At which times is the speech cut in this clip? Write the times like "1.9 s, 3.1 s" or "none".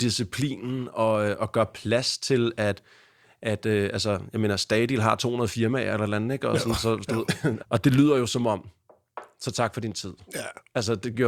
7.6 s